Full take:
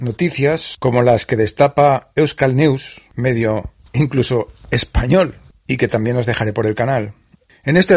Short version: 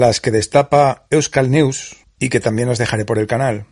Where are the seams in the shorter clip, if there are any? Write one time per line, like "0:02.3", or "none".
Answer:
0:02.0